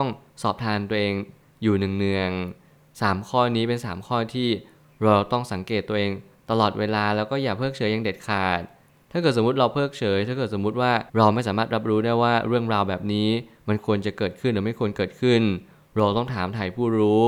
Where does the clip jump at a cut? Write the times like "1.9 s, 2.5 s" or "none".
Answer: 11.1 s